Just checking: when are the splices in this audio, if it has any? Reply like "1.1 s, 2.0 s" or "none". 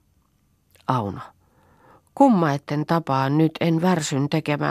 none